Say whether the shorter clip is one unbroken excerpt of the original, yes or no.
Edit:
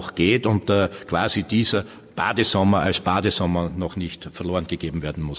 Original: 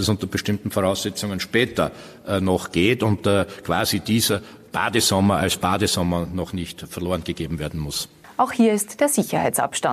yes